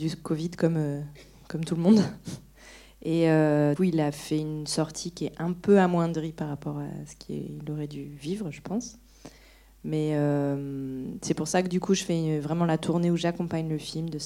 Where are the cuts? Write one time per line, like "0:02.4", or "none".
0:03.8